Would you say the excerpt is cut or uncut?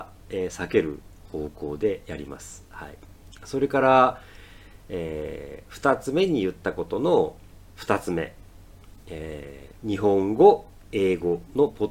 cut